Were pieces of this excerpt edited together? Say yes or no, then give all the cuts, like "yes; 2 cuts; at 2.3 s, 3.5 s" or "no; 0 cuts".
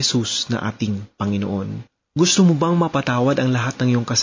no; 0 cuts